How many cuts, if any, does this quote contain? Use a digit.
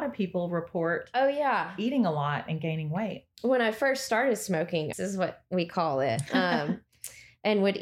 1